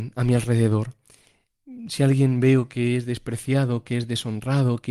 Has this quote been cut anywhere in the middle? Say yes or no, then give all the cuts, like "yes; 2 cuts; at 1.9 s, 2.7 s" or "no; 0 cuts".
no; 0 cuts